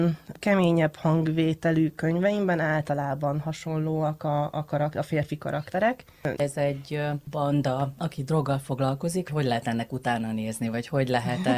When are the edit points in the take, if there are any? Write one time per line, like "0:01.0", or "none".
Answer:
0:06.3